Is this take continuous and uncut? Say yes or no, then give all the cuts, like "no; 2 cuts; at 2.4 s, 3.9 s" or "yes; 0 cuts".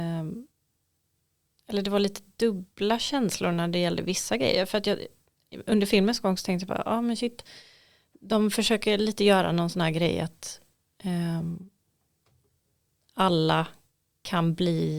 yes; 0 cuts